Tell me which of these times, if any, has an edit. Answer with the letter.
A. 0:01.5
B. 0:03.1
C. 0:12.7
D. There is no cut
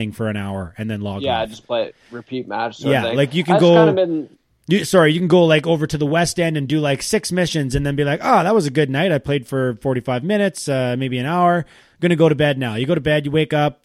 D